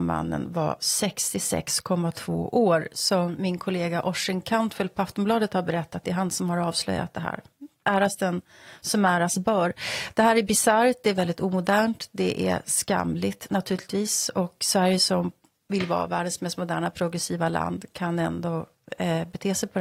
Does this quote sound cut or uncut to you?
cut